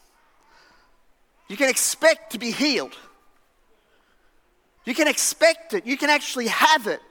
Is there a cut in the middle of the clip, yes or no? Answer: yes